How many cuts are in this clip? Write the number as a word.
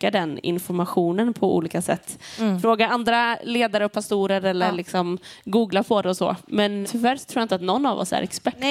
one